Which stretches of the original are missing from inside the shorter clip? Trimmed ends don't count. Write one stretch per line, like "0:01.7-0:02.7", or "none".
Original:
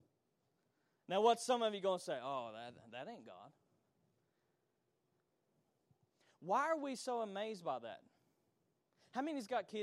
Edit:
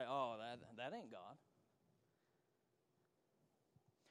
none